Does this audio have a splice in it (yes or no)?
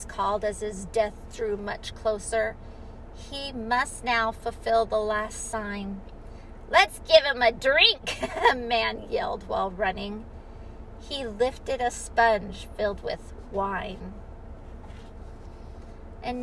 no